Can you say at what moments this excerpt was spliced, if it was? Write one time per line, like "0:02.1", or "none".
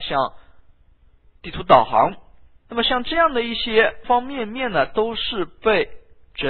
0:02.7
0:04.0